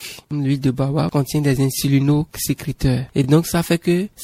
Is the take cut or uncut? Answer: uncut